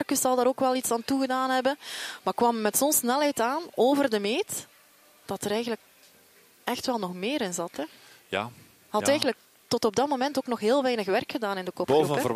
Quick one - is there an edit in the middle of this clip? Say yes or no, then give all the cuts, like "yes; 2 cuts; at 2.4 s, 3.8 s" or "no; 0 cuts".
no; 0 cuts